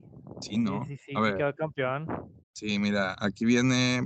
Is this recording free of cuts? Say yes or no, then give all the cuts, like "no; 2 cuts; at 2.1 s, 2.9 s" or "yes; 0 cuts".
no; 1 cut; at 2.4 s